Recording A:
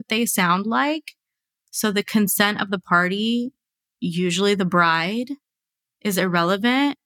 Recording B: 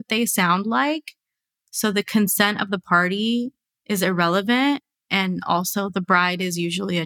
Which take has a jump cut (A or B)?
B